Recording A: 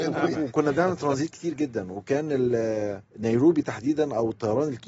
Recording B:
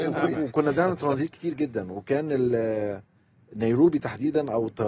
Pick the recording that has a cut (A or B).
A